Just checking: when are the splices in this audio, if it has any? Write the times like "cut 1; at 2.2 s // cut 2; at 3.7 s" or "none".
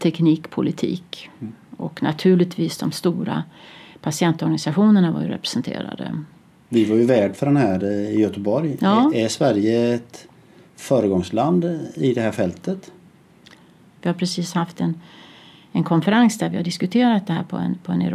cut 1; at 14.0 s